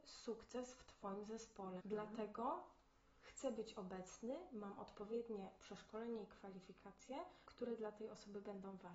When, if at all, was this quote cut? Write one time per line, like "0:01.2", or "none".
0:01.8
0:07.5